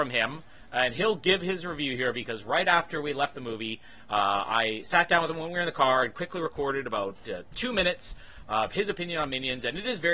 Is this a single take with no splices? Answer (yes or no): yes